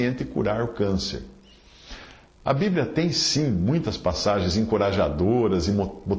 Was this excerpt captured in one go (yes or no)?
yes